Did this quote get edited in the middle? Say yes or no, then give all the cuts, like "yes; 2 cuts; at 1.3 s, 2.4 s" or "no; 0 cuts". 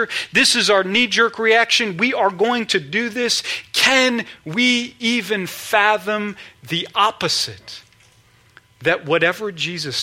no; 0 cuts